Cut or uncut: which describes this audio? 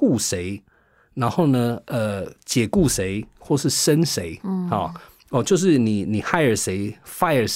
uncut